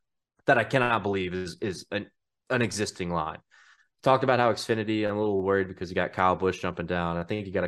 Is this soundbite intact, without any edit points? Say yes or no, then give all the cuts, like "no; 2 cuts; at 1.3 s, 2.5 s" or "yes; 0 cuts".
yes; 0 cuts